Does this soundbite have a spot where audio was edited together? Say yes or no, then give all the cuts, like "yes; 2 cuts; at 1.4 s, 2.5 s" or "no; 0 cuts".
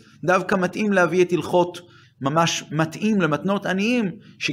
yes; 1 cut; at 2.0 s